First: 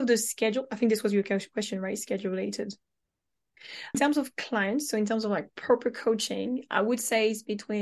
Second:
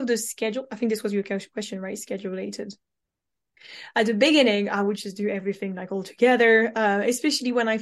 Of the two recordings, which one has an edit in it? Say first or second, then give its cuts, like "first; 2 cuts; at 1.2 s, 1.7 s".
first; 1 cut; at 3.9 s